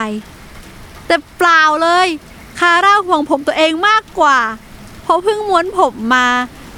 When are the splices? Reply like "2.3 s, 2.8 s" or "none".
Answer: none